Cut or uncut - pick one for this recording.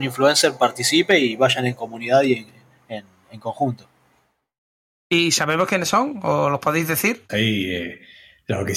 cut